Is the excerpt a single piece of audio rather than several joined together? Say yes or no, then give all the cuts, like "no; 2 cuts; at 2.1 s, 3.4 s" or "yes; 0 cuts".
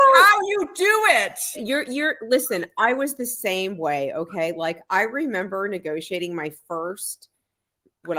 no; 1 cut; at 1.5 s